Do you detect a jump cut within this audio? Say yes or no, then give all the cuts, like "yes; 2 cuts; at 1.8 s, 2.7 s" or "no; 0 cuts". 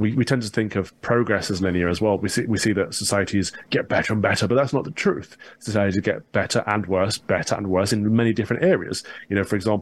no; 0 cuts